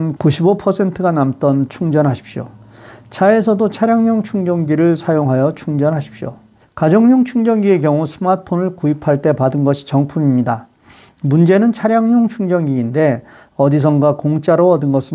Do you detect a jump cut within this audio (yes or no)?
yes